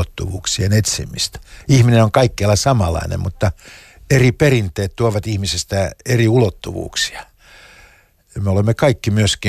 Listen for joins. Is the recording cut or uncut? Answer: uncut